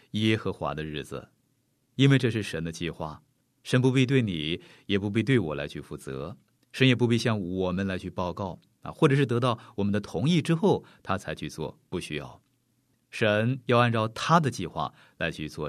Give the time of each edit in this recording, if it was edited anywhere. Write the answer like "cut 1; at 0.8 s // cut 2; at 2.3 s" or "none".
cut 1; at 1.9 s // cut 2; at 3.4 s // cut 3; at 12.9 s